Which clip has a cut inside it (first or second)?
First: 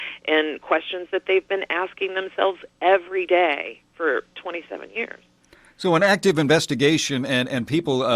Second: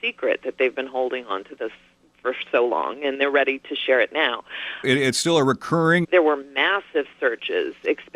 second